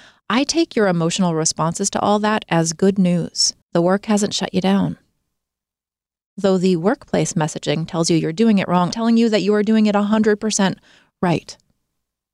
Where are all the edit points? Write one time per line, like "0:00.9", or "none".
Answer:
0:03.6
0:08.9